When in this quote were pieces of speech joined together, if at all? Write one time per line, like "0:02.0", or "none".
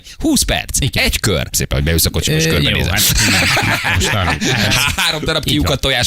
0:01.5